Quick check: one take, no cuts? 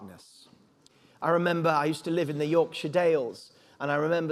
yes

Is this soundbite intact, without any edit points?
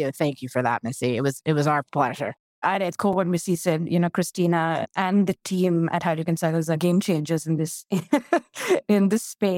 yes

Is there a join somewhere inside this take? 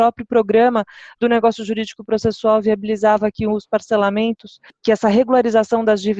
no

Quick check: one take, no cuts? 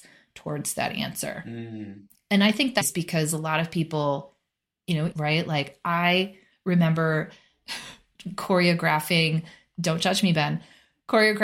no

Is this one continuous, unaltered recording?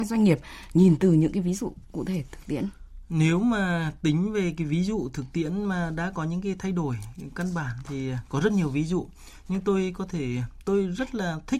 yes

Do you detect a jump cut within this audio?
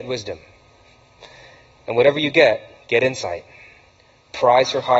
no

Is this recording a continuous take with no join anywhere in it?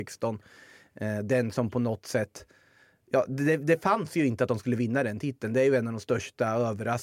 yes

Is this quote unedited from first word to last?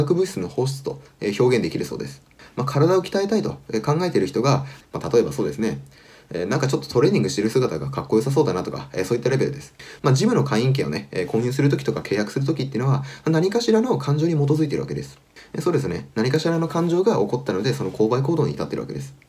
no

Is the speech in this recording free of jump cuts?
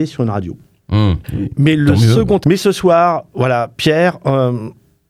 no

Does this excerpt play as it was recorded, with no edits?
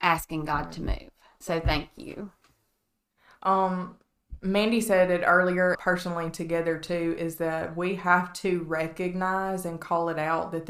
no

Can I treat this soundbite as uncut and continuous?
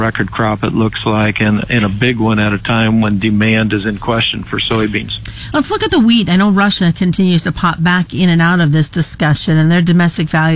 yes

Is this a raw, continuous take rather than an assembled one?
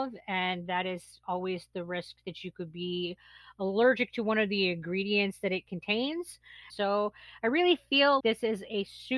no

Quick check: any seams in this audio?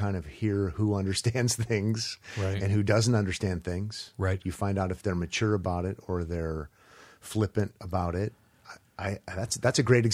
no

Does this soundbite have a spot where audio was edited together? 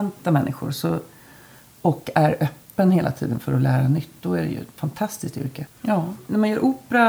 yes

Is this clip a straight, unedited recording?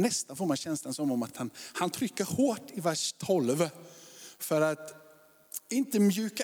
yes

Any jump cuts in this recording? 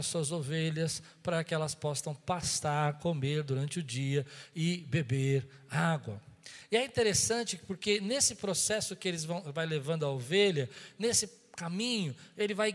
no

